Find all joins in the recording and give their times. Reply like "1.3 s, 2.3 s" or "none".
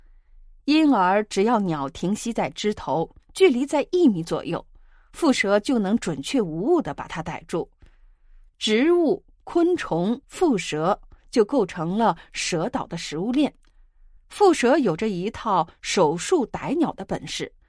10.2 s, 14.2 s